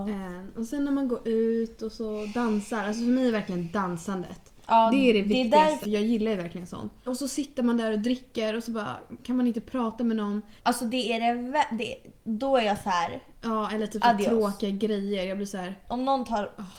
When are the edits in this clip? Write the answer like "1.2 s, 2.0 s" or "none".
5.8 s, 7.1 s, 10.6 s